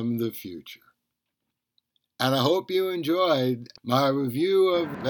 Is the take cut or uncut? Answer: uncut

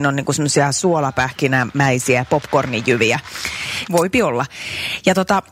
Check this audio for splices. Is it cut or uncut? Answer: cut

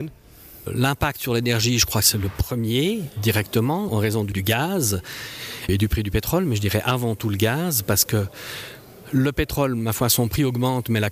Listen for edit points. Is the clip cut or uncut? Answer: cut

